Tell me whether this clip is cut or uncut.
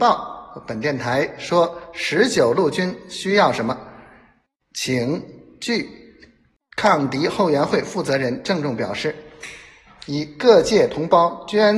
uncut